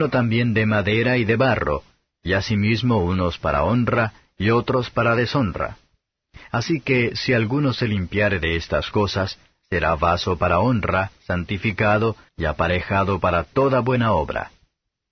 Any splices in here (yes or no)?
yes